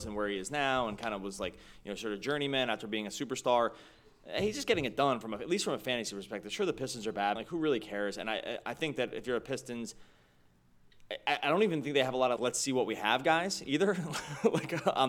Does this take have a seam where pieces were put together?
yes; 2 cuts; at 7.4 s, 12.4 s

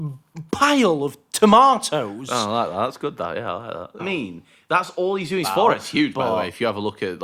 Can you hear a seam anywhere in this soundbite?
yes; 2 cuts; at 4.0 s, 5.4 s

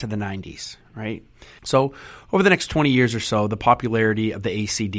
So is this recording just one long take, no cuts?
no; 1 cut; at 1.6 s

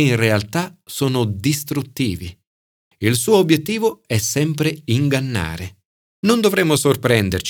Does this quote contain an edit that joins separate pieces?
yes; 1 cut; at 6.0 s

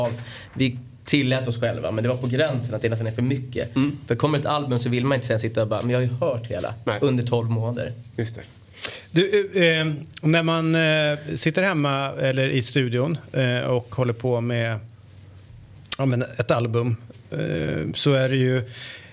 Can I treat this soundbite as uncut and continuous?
yes; 0 cuts

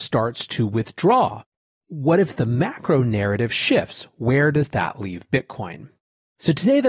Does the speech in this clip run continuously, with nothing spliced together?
yes; 0 cuts

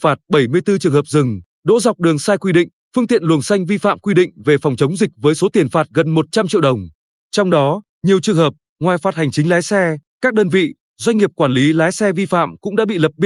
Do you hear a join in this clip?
no; 0 cuts

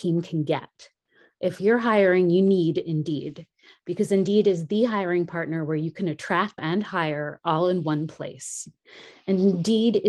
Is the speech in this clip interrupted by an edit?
yes; 1 cut; at 6.6 s

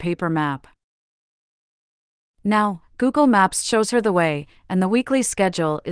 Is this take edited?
no; 0 cuts

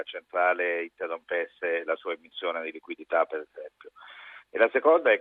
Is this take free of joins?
yes; 0 cuts

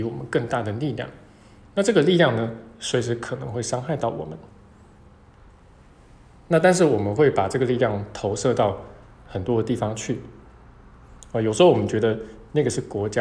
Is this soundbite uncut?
yes; 0 cuts

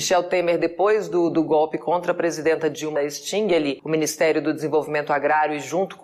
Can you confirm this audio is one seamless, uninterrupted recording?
no; 1 cut; at 3.0 s

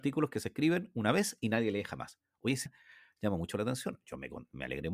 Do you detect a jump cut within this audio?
yes; 1 cut; at 2.7 s

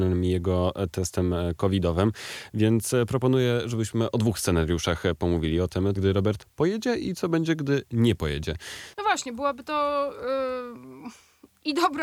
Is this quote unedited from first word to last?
no; 2 cuts; at 6.0 s, 8.9 s

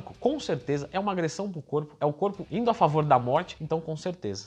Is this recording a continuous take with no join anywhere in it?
yes; 0 cuts

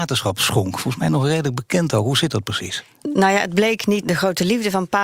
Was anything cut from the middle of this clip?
no; 0 cuts

